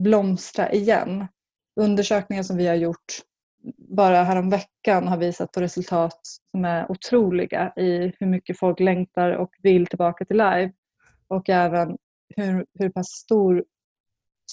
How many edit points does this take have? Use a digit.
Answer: 0